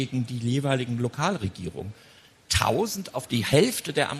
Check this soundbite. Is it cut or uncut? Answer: uncut